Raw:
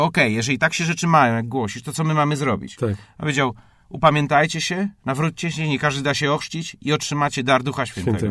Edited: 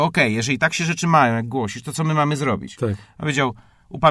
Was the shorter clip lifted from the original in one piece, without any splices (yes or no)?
yes